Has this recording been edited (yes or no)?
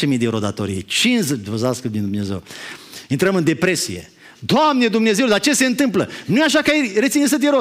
no